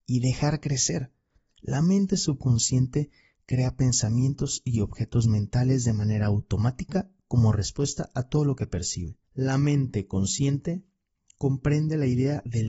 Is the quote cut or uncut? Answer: cut